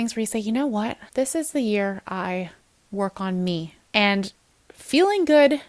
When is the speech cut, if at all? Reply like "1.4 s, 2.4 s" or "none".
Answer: 1.1 s, 3.8 s